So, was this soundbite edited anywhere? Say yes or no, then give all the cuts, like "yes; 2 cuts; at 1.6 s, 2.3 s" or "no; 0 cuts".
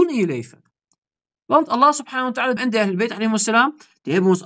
yes; 1 cut; at 2.6 s